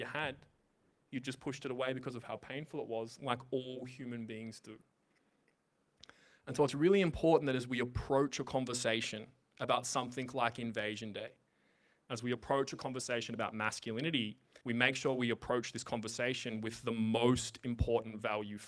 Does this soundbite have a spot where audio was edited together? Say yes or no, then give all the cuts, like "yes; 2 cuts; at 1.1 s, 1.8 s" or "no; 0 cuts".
yes; 2 cuts; at 12.0 s, 14.6 s